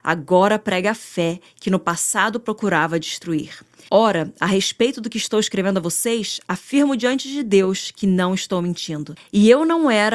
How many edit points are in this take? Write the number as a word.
two